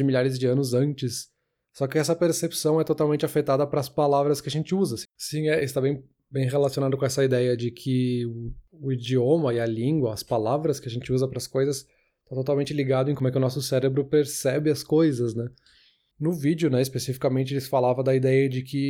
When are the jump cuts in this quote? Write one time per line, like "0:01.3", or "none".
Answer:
0:05.0